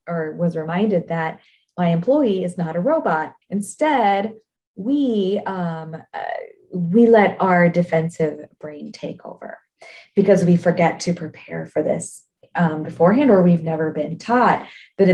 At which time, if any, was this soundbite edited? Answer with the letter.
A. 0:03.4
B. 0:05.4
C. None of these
A